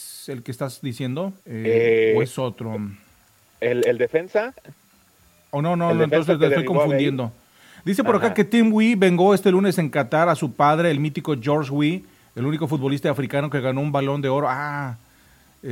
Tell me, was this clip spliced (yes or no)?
yes